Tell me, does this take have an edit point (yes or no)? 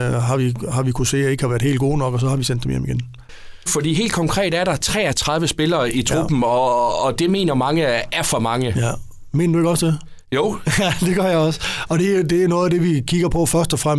yes